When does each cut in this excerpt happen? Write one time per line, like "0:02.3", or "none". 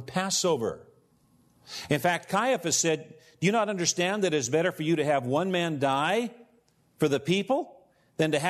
0:01.9